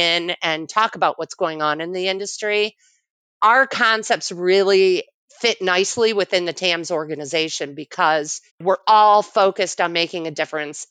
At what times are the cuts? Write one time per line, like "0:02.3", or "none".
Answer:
0:03.3
0:08.5

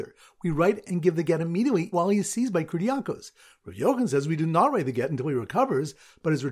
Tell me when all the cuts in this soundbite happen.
0:01.9

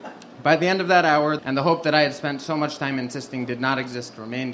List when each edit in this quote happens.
0:01.4

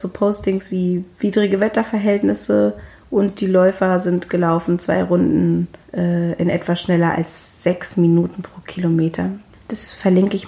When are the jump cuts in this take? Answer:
0:05.8
0:09.5

